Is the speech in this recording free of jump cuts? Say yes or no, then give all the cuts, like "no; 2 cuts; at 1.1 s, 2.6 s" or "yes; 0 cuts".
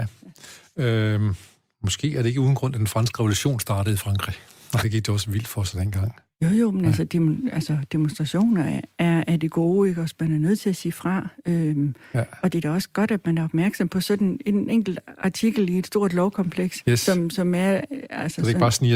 no; 1 cut; at 4.8 s